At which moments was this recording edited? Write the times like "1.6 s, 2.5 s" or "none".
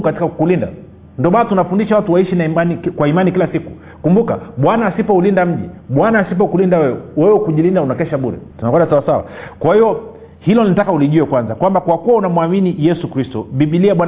8.5 s